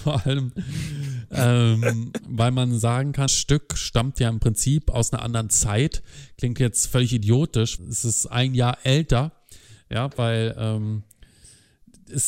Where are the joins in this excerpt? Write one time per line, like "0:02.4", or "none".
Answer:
0:03.3
0:07.8